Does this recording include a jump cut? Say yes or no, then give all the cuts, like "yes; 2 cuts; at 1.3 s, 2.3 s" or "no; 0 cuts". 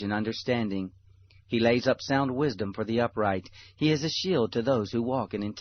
no; 0 cuts